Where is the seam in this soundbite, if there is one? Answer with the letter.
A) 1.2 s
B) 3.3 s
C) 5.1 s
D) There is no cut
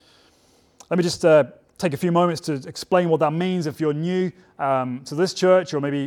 D